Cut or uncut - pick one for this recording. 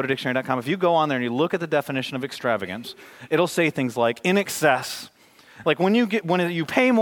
cut